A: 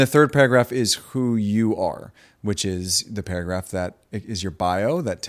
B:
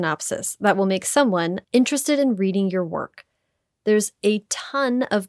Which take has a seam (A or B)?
B